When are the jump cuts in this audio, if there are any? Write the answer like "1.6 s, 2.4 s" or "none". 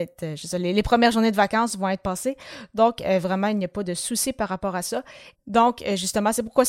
5.3 s